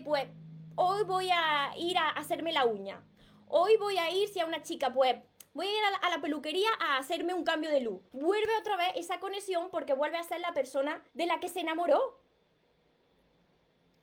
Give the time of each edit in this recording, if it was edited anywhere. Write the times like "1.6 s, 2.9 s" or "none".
8.1 s, 11.1 s